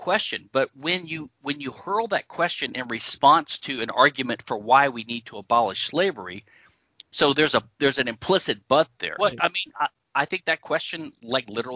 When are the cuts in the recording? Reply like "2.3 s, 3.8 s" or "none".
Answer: 9.2 s